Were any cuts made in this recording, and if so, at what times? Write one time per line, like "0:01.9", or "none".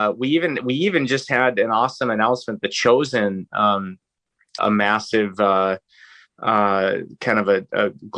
0:04.6